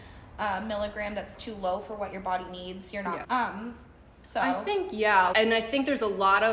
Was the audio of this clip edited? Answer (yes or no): yes